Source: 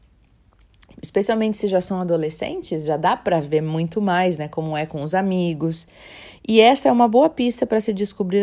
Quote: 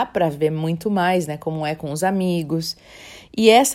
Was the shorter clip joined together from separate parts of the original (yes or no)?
no